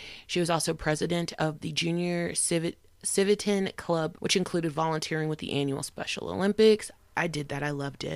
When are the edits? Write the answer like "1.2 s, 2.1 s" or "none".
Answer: 4.2 s